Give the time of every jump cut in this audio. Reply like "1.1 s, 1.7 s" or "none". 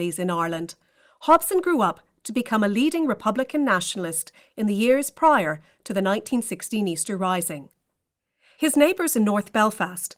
none